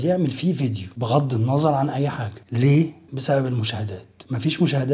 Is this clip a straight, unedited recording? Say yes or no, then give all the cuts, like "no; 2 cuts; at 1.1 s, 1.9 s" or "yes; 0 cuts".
no; 1 cut; at 3.1 s